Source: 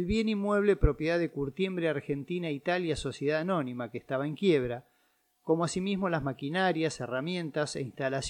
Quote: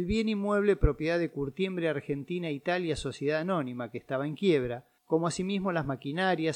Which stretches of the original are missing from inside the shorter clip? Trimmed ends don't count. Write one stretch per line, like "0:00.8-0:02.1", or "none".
0:05.0-0:05.4